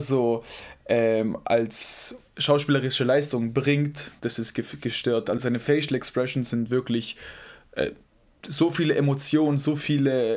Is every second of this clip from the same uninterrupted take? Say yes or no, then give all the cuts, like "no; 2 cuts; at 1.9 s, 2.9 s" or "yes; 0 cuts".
no; 2 cuts; at 4.2 s, 5.4 s